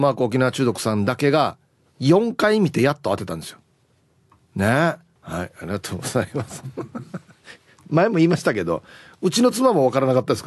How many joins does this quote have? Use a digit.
1